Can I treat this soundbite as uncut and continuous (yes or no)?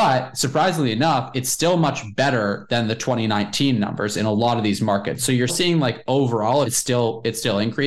no